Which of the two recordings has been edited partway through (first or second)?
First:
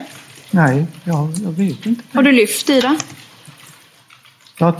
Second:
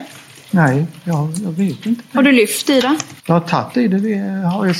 second